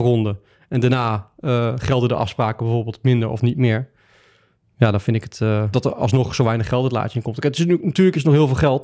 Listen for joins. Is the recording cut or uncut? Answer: cut